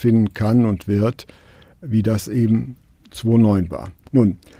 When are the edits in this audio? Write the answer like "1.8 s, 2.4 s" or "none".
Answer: none